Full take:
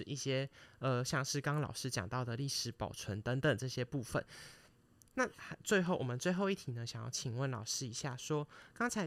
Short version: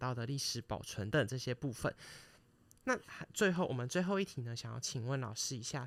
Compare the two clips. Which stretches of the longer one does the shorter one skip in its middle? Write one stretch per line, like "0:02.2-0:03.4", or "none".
0:03.2-0:03.4